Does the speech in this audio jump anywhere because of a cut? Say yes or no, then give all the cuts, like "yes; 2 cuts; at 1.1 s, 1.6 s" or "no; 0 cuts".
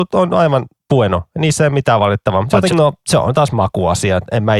yes; 1 cut; at 2.7 s